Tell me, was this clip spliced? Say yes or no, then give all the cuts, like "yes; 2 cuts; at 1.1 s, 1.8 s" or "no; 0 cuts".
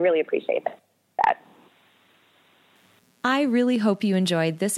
no; 0 cuts